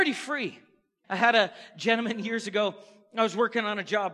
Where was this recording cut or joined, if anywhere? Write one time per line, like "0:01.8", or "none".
0:01.0